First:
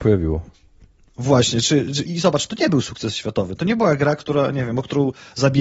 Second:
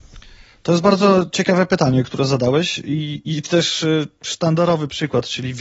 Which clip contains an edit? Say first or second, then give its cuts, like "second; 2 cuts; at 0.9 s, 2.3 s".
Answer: first; 1 cut; at 2.0 s